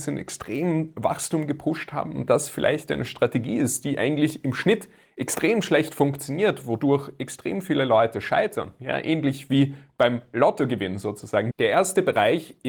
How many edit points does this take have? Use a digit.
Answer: 1